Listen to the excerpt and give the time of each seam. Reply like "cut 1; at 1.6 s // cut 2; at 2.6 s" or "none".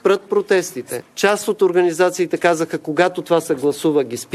cut 1; at 1.1 s